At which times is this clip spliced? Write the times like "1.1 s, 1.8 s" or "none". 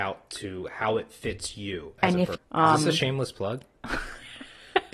2.3 s